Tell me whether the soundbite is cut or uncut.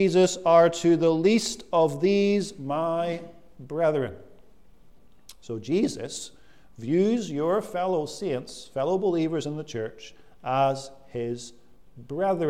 uncut